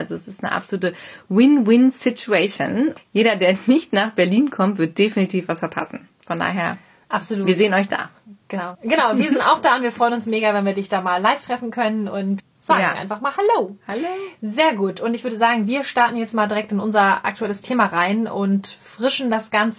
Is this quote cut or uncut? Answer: cut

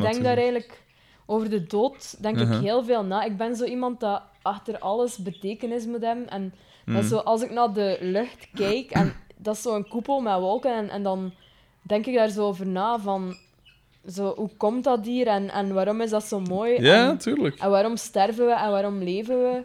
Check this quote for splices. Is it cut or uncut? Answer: uncut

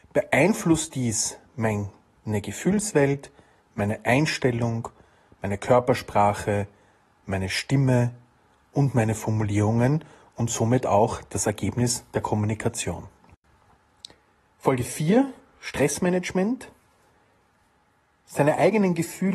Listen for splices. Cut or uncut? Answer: uncut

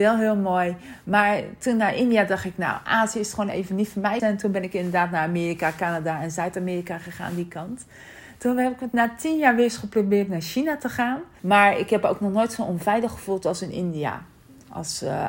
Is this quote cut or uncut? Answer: cut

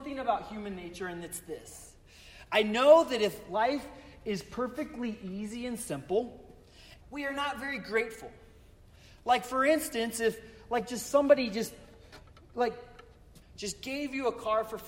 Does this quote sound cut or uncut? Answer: cut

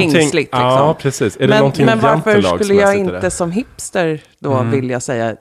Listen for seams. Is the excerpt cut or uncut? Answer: uncut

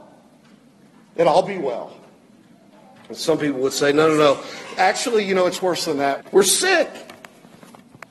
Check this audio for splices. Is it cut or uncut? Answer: cut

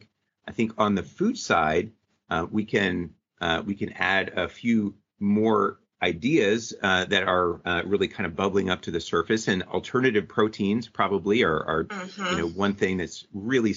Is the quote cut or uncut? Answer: uncut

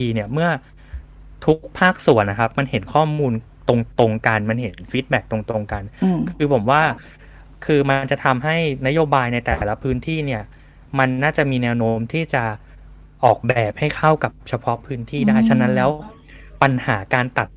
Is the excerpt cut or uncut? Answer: uncut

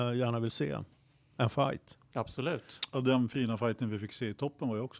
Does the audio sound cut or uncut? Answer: uncut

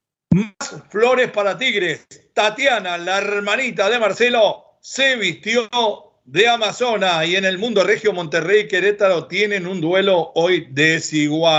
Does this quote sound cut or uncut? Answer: uncut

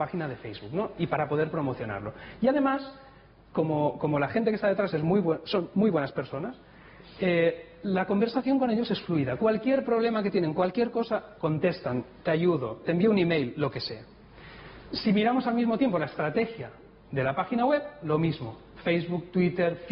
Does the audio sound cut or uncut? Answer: cut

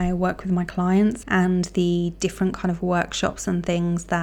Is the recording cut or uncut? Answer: cut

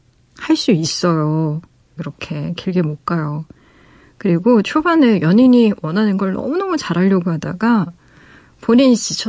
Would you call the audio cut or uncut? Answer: cut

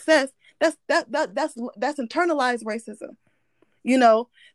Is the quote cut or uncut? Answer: uncut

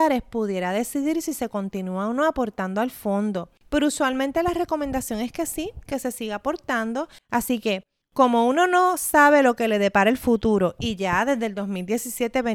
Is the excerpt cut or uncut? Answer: cut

